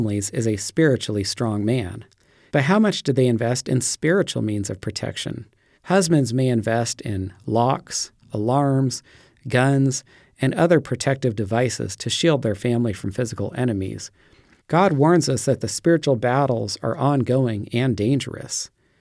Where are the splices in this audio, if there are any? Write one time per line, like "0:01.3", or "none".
0:02.5
0:05.8
0:14.6